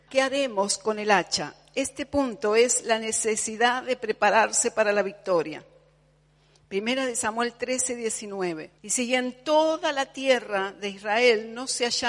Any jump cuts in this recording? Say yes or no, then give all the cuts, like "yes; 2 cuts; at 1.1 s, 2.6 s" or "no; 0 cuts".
yes; 1 cut; at 8.8 s